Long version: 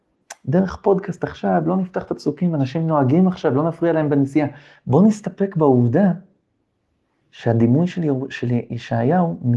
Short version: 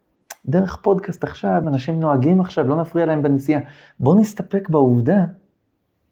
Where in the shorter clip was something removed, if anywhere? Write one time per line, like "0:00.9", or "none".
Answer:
0:01.6